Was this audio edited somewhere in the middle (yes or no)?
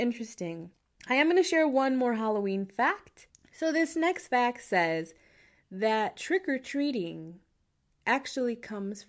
no